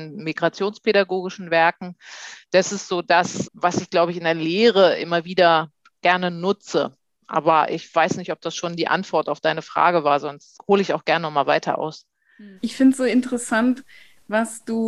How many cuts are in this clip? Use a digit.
3